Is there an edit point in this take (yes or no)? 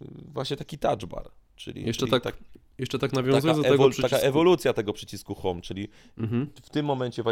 no